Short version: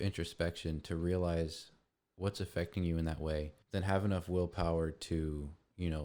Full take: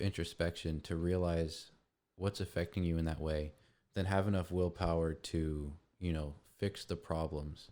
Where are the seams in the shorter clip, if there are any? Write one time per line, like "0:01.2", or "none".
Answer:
0:03.6

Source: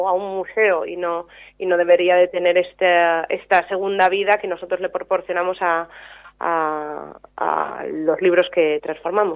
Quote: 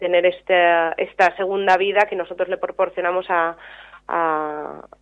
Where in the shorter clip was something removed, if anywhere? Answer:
none

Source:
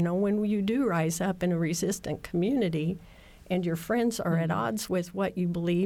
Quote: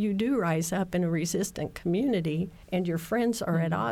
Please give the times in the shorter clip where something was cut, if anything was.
0:02.6

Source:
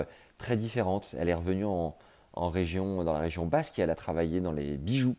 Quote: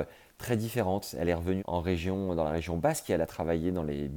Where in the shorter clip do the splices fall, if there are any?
0:01.6

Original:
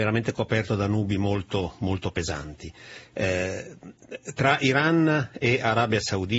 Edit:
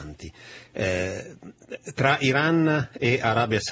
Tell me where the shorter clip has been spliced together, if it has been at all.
none

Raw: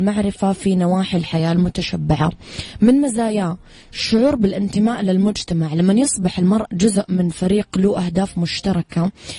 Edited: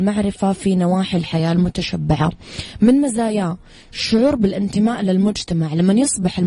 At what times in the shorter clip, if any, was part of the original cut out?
none

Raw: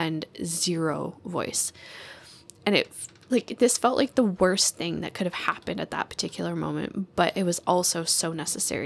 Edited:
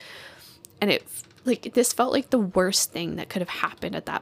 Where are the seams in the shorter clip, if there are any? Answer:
none

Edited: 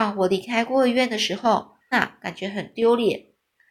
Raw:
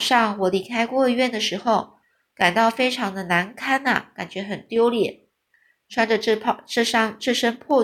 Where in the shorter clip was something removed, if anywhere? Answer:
0:01.9

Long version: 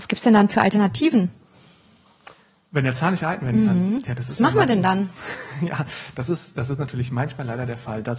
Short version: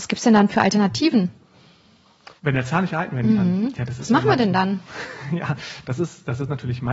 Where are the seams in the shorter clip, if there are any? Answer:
0:02.4

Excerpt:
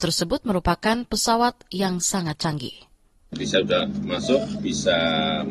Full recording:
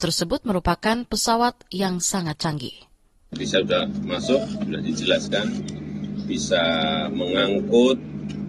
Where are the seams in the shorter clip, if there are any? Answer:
0:04.6

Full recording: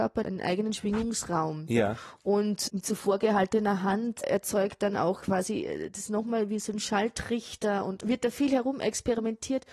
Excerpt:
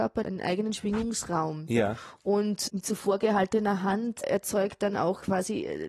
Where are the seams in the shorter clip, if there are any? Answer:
none

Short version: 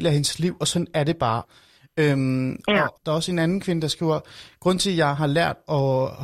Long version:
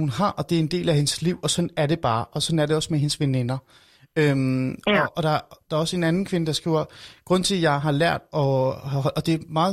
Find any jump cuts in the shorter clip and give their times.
0:01.4
0:03.0

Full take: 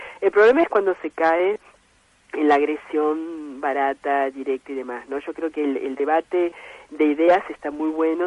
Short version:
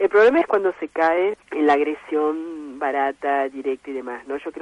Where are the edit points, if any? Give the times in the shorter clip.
0:01.4

